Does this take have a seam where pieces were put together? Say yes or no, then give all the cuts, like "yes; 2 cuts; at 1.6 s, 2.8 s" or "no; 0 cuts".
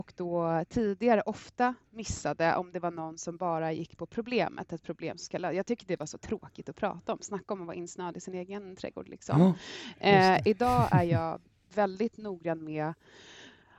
no; 0 cuts